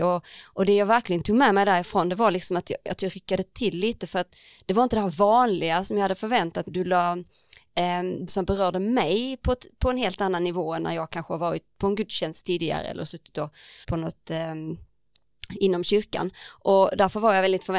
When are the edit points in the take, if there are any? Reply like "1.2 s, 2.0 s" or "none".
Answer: 6.7 s, 8.3 s, 13.8 s